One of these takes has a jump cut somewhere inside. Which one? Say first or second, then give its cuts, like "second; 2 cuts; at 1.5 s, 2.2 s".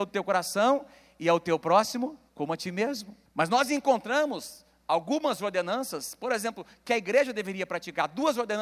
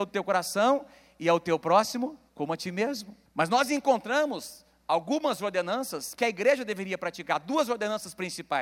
second; 1 cut; at 6.1 s